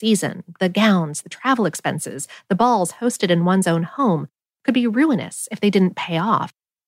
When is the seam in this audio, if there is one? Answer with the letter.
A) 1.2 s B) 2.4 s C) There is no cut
A